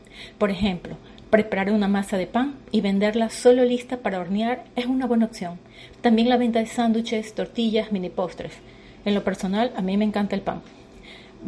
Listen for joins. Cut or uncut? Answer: cut